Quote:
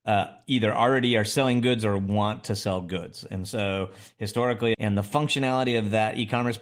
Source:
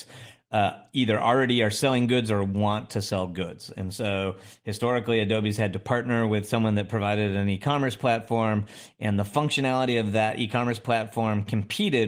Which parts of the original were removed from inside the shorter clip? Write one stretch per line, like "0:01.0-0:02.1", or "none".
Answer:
0:05.2-0:09.0